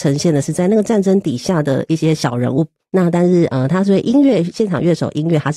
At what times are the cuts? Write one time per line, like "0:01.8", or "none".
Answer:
0:02.8